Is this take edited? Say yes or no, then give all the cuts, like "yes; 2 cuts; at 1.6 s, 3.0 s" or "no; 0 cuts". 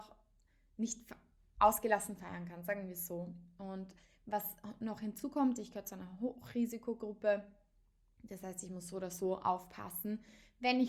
no; 0 cuts